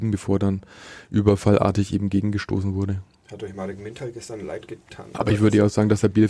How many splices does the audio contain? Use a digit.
1